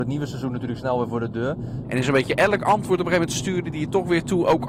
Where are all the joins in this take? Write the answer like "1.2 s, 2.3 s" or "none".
1.8 s